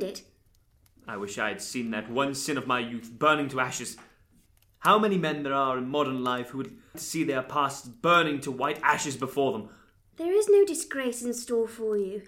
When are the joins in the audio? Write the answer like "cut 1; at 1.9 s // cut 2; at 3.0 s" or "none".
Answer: cut 1; at 6.9 s // cut 2; at 10.1 s